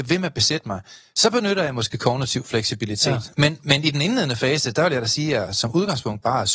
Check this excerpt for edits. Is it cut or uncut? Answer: cut